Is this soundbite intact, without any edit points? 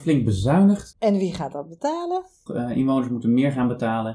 no; 2 cuts; at 0.9 s, 2.5 s

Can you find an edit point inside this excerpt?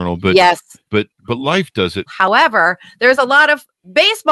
yes; 1 cut; at 2.1 s

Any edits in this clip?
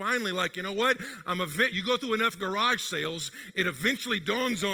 no; 0 cuts

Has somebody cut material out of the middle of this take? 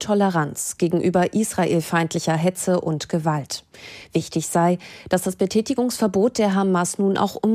no; 0 cuts

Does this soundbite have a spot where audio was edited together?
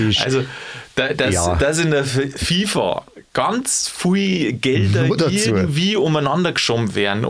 no; 0 cuts

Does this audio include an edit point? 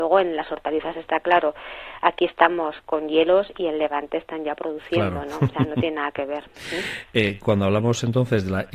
no; 0 cuts

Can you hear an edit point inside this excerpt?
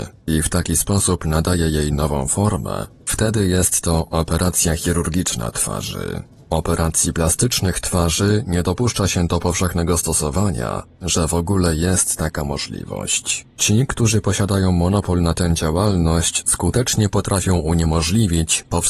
yes; 1 cut; at 11.0 s

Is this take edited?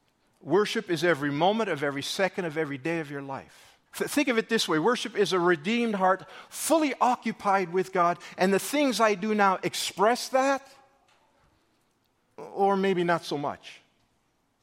yes; 1 cut; at 3.9 s

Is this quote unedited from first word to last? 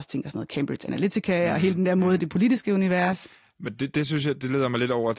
yes; 0 cuts

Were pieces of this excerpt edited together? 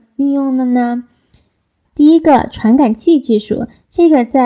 yes; 1 cut; at 1.8 s

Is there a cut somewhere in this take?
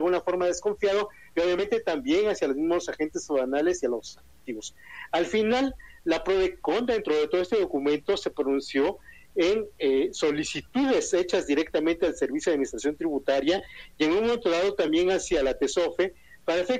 no; 0 cuts

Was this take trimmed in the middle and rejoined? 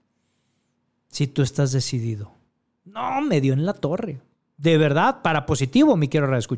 no; 0 cuts

